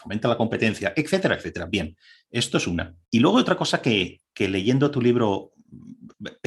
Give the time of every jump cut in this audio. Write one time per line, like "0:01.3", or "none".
0:03.0

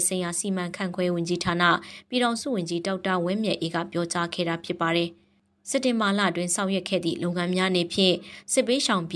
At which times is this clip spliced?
none

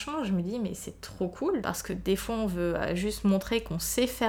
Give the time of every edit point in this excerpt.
0:01.6

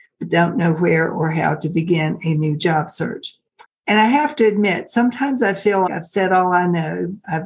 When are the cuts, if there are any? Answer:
0:03.6
0:05.9

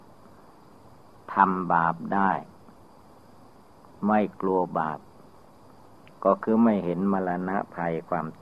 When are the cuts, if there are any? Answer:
none

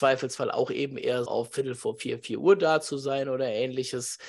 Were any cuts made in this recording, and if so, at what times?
0:01.3

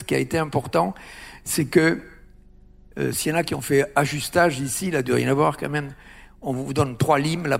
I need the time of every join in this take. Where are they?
none

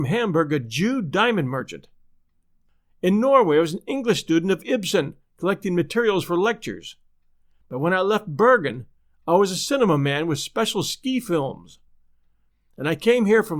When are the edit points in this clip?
none

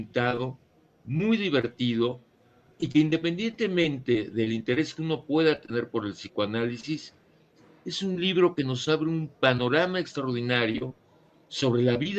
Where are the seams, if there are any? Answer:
none

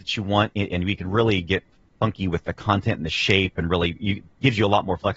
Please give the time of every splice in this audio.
none

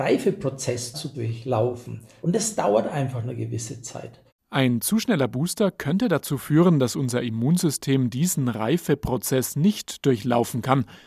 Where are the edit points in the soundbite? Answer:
none

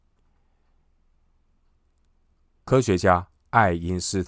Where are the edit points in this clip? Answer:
none

